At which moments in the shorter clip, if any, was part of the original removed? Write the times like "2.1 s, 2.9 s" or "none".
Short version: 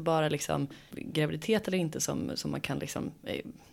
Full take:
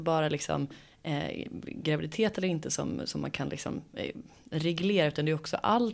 0.9 s